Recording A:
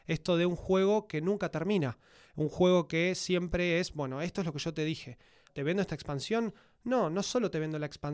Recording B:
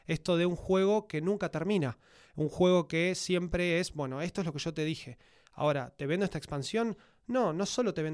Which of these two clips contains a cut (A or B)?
A